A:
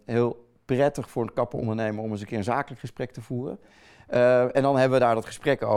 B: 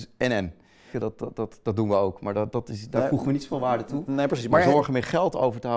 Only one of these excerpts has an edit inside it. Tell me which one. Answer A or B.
B